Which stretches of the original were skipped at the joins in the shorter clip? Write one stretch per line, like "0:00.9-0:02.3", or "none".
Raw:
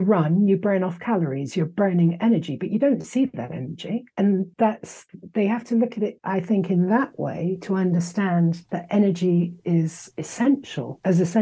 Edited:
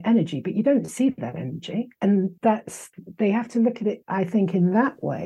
none